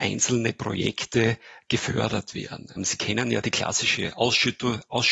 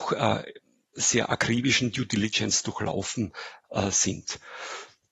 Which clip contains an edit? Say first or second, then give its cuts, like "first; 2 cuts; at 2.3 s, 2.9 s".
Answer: first; 1 cut; at 2.8 s